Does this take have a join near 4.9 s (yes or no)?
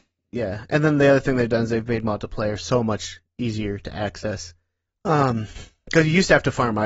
yes